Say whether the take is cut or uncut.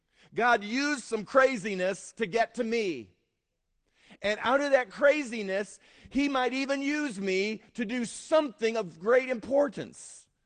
uncut